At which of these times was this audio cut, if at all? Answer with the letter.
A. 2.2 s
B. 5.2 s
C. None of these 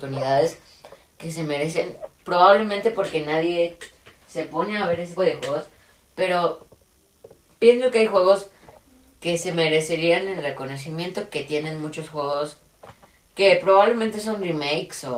B